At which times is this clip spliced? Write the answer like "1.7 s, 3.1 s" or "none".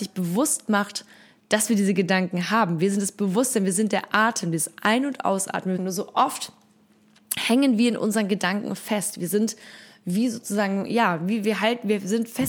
5.8 s